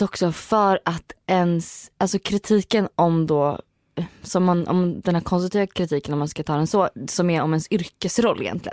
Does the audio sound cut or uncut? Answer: uncut